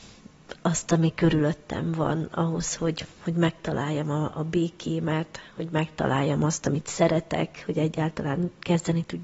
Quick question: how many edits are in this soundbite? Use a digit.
0